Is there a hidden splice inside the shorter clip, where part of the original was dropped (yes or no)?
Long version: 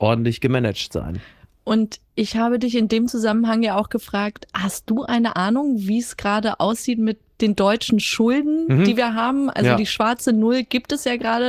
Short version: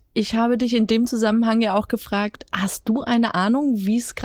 no